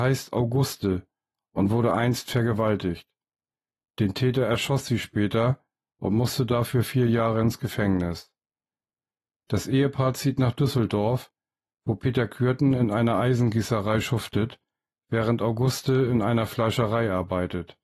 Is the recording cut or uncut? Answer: uncut